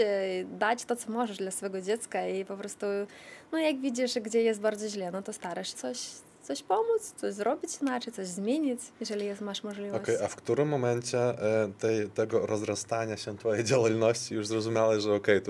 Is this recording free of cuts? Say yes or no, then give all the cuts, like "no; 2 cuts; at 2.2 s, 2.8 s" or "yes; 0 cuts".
no; 2 cuts; at 5.7 s, 8.9 s